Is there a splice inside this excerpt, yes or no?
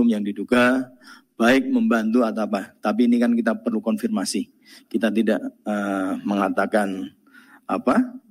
no